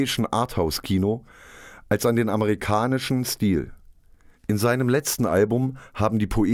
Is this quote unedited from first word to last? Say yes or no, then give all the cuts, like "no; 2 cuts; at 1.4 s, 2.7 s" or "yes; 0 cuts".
no; 1 cut; at 4.3 s